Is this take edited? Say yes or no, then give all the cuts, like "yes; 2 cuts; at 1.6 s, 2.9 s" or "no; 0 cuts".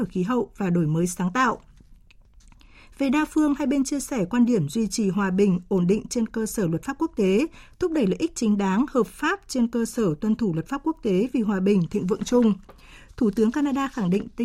no; 0 cuts